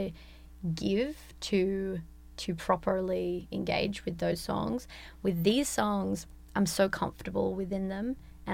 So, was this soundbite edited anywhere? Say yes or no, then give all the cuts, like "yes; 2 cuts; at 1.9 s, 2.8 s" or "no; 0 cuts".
no; 0 cuts